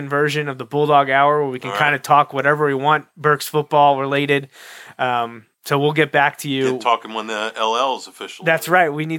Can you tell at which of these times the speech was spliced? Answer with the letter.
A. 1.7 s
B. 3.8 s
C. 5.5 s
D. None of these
C